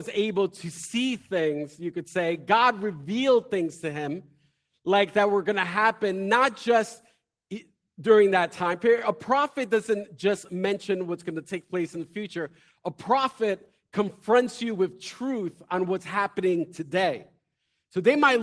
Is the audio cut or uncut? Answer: uncut